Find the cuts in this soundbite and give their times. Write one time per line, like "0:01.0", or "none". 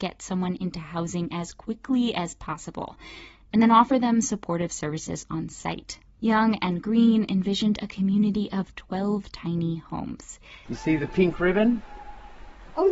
0:06.2
0:10.7